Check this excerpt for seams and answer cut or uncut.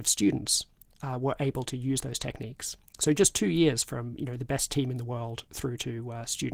uncut